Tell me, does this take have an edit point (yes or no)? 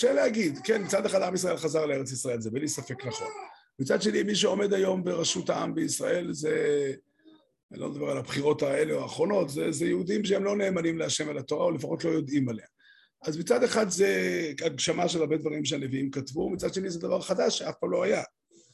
no